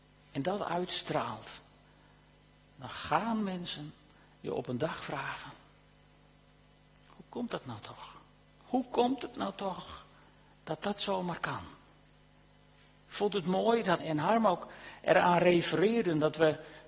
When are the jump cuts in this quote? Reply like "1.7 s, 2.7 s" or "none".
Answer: 14.0 s